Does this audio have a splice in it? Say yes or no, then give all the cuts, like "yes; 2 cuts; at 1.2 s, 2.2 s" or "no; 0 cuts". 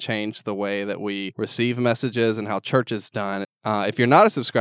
yes; 1 cut; at 3.4 s